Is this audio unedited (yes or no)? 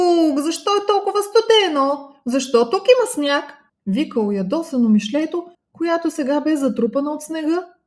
no